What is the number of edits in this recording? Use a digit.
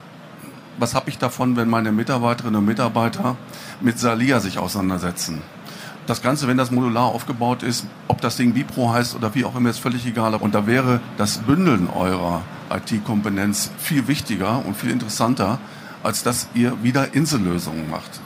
3